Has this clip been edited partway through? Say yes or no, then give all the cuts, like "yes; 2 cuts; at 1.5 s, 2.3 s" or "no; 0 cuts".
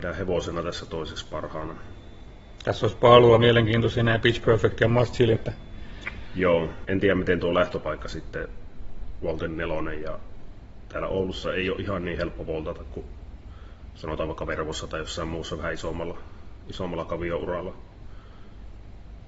yes; 2 cuts; at 5.4 s, 6.8 s